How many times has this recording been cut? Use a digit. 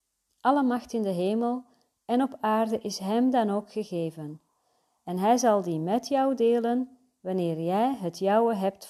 0